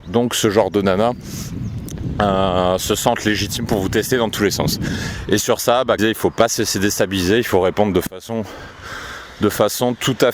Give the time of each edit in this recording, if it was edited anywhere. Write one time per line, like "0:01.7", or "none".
0:06.0